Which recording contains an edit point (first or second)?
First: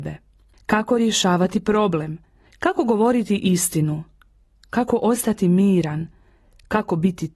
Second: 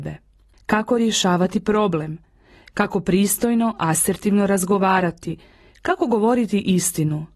first